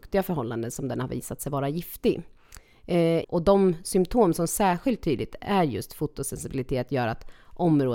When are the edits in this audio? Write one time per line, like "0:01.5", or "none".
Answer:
0:03.2